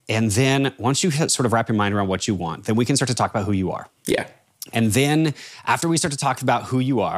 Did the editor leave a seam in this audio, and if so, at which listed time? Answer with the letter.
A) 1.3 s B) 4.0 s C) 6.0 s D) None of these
B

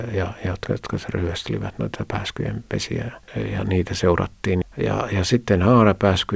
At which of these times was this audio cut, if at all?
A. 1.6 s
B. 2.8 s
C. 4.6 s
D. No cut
C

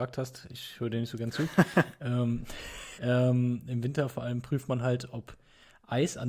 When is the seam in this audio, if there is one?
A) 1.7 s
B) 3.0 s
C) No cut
B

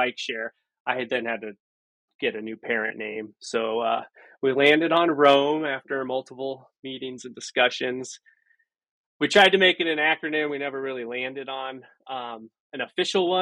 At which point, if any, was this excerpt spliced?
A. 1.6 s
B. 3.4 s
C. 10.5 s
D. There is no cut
D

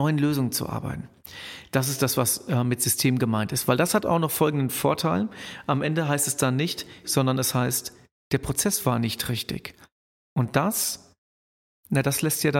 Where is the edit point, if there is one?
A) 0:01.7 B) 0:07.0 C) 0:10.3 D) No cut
B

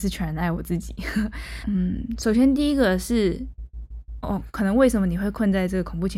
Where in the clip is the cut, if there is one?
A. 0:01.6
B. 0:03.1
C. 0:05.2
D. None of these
A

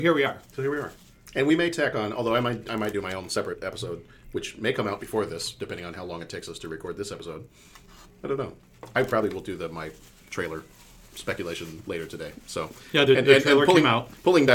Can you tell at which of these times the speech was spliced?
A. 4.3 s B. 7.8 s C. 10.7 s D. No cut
D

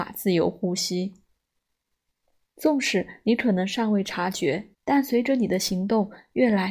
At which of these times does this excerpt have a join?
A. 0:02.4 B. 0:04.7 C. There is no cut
B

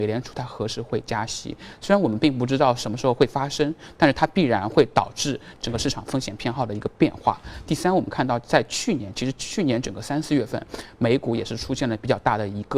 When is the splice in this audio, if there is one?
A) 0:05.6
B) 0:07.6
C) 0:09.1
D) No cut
D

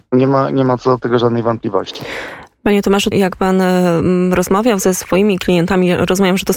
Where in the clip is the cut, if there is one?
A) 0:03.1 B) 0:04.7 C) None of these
A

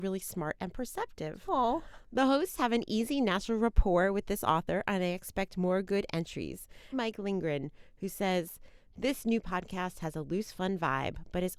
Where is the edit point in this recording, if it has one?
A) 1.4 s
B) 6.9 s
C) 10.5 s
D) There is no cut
B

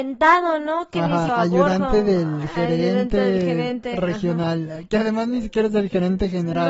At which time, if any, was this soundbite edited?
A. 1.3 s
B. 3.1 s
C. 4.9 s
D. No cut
A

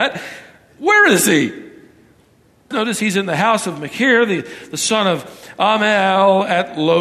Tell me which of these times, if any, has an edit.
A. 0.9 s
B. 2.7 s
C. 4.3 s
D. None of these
B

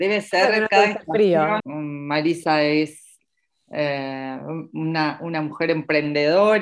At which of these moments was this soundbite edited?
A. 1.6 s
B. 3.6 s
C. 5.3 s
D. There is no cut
A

